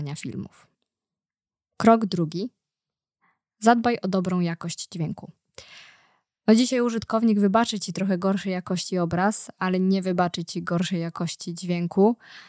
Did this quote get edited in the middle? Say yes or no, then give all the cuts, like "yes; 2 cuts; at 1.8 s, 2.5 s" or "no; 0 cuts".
no; 0 cuts